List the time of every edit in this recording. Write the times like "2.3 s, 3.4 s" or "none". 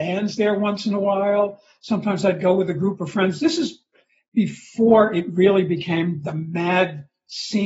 none